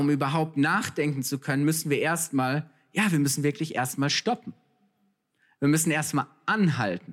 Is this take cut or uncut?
uncut